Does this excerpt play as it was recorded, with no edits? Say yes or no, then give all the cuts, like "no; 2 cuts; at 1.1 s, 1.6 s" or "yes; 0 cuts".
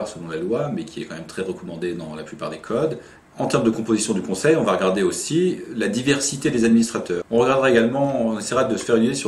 no; 2 cuts; at 3.2 s, 7.2 s